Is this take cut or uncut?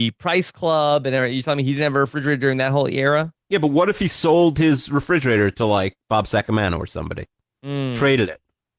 uncut